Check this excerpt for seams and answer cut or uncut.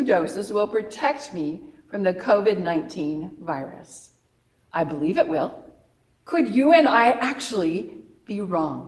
cut